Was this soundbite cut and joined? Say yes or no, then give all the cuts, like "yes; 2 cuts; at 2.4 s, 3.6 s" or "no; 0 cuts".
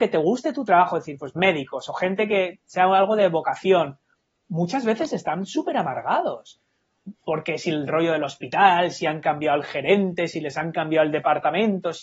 no; 0 cuts